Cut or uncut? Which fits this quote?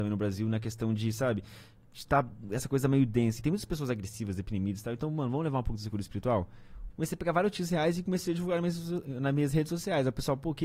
cut